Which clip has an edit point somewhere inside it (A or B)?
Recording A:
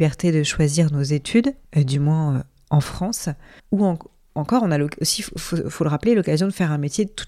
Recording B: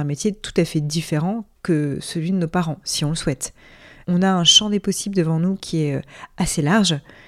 A